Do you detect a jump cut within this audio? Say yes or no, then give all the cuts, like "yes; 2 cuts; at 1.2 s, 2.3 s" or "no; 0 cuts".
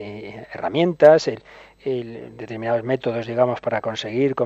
no; 0 cuts